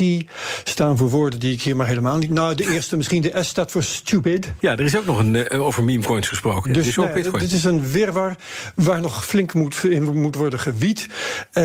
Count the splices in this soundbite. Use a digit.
2